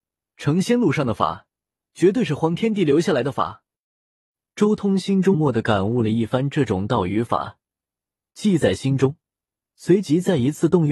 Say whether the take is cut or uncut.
cut